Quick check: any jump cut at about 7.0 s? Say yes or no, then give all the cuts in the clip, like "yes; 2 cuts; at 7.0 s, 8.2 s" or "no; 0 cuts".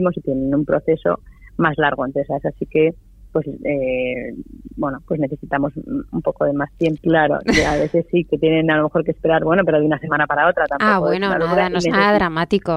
yes; 1 cut; at 7.0 s